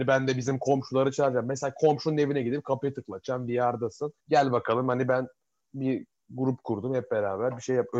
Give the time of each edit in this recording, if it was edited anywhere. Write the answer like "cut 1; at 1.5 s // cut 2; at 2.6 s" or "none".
cut 1; at 4.2 s